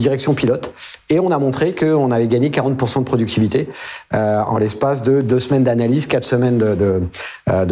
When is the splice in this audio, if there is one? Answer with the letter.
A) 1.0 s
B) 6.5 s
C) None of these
C